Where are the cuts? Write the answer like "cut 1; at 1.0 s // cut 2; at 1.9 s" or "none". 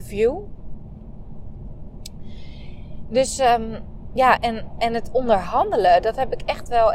cut 1; at 4.4 s